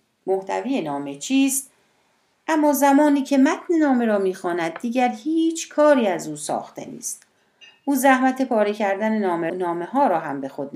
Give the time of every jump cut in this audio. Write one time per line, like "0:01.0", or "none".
0:09.5